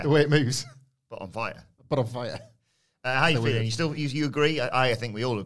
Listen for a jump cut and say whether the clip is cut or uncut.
uncut